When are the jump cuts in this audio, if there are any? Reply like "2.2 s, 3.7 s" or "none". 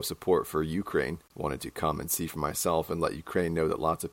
1.2 s